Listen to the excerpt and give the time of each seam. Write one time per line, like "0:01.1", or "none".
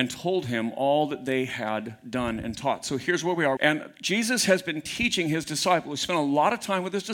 0:03.6